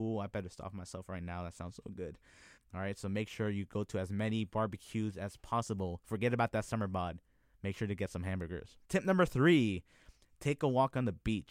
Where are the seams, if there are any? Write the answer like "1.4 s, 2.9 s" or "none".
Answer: 2.6 s, 8.8 s